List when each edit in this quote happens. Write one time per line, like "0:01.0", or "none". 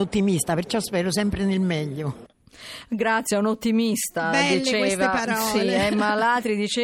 none